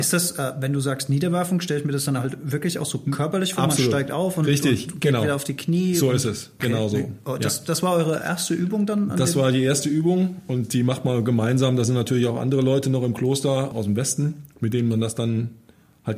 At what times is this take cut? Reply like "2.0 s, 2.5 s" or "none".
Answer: 6.6 s, 13.7 s

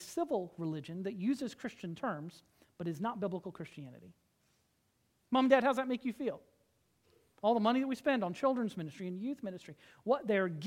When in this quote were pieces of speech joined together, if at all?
none

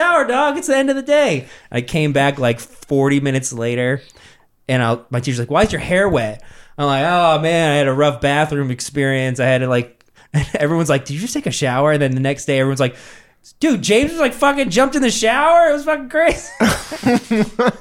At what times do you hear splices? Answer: none

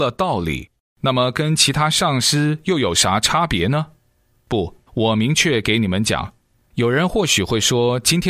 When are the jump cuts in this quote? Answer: 4.9 s, 6.6 s

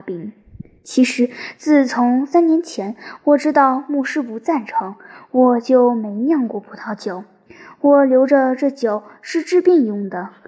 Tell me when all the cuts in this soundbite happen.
none

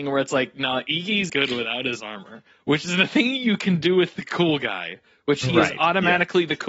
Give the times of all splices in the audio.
1.3 s

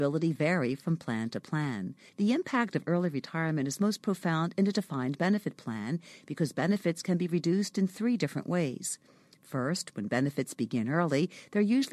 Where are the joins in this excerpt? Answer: 2.1 s

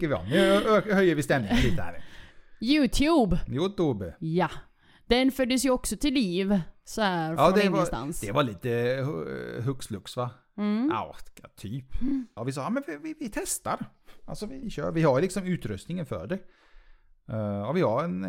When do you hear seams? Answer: 12.4 s, 14.6 s

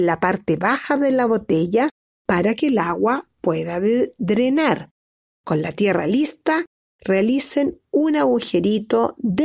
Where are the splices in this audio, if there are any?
5.3 s

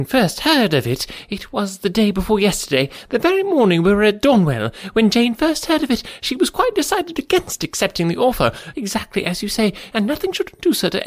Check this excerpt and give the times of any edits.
8.7 s, 9.9 s

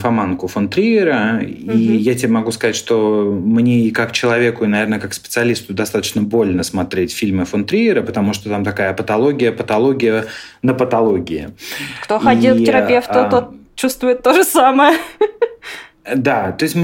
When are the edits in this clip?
none

